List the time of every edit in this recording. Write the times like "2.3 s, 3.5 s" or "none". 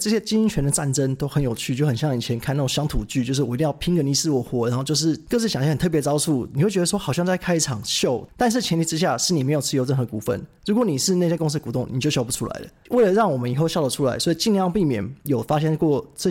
none